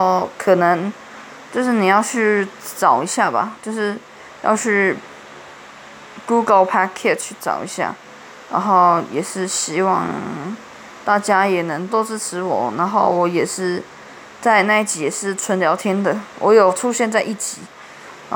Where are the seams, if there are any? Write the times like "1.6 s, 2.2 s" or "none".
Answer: 11.9 s